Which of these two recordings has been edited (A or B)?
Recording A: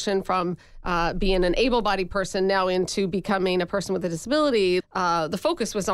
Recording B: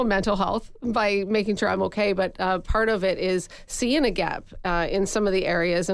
A